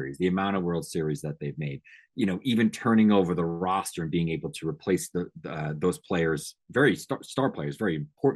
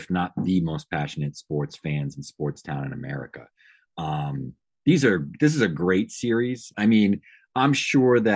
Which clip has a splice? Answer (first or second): second